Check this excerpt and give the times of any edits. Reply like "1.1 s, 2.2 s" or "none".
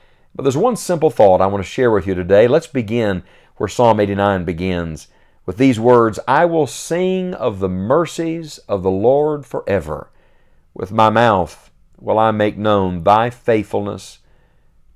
none

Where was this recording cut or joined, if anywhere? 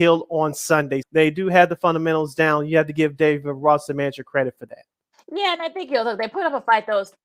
1.0 s

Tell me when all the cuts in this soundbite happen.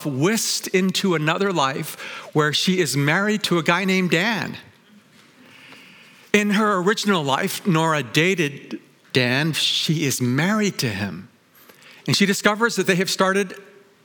9.5 s

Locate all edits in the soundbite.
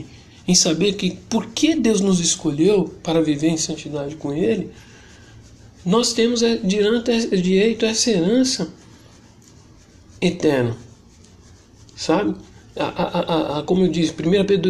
none

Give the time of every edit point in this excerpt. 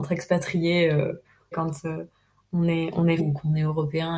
1.5 s, 3.2 s

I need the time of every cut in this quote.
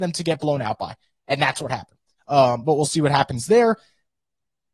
2.2 s

